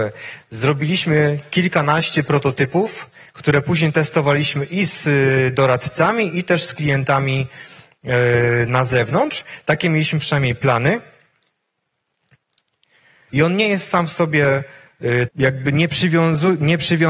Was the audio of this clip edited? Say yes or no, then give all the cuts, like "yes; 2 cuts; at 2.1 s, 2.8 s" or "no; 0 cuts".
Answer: yes; 2 cuts; at 13.3 s, 15.3 s